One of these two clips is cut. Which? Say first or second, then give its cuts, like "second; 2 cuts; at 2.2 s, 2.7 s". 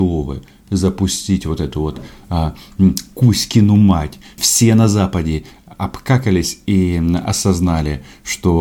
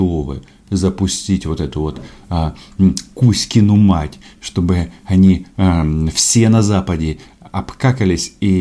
first; 1 cut; at 4.4 s